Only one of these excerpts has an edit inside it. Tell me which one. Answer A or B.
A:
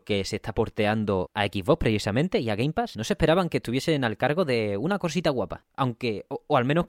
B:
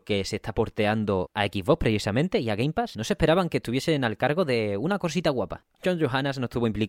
B